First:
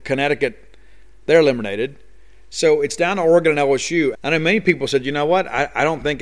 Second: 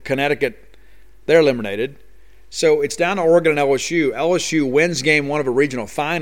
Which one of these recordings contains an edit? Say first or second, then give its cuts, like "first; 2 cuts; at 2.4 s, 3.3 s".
first; 1 cut; at 4.1 s